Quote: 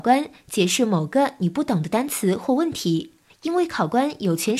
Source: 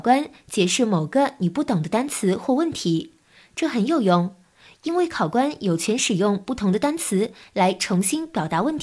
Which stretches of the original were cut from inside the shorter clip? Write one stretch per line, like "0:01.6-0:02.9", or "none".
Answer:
0:03.3-0:04.7